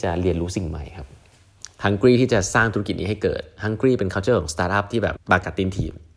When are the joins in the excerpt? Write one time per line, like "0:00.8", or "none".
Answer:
0:05.2

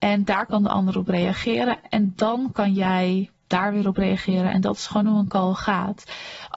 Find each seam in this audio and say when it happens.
none

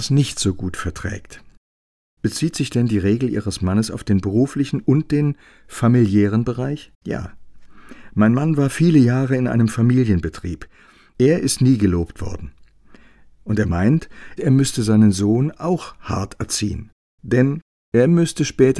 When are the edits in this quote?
0:07.0

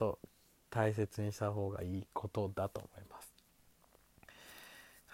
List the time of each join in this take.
none

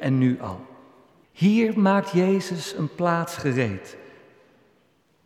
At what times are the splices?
0:01.2

